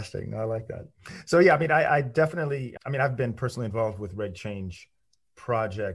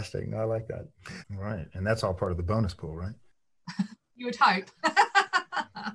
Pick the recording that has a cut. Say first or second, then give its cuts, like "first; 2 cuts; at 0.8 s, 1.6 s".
second; 1 cut; at 1.2 s